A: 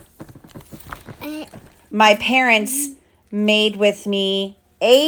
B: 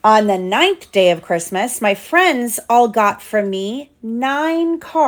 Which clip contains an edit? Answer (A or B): A